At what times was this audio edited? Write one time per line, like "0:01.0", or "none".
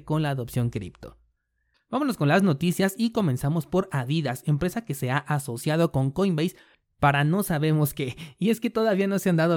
0:01.7